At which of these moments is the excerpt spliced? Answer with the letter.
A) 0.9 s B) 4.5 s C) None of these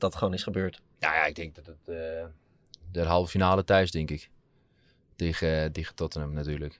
A